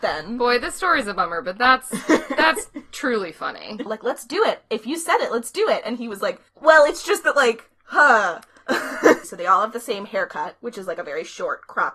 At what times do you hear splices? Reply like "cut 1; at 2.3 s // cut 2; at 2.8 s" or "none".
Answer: cut 1; at 3.9 s // cut 2; at 6.5 s // cut 3; at 9.2 s